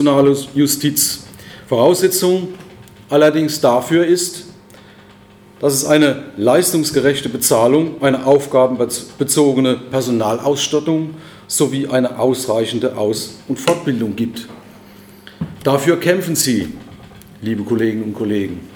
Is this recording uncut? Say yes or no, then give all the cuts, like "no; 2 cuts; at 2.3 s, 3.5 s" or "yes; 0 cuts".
yes; 0 cuts